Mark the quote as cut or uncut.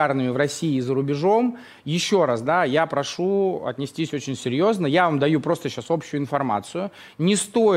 uncut